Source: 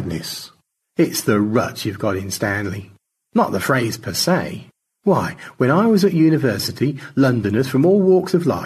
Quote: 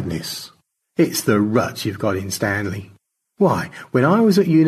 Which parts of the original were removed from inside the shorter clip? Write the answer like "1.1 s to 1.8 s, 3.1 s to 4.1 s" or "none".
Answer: 3.2 s to 4.9 s